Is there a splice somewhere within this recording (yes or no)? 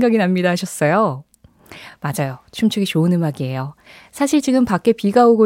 no